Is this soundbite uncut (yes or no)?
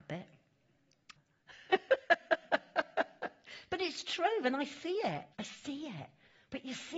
no